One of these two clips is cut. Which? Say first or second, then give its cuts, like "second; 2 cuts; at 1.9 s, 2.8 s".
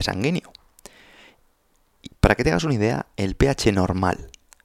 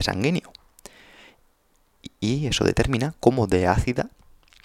first; 1 cut; at 2.1 s